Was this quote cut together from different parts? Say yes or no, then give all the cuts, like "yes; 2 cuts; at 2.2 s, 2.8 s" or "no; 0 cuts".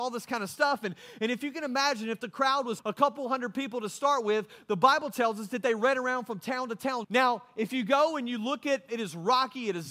yes; 3 cuts; at 2.8 s, 7.0 s, 8.9 s